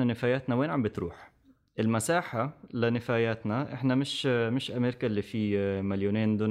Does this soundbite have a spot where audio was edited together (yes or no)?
no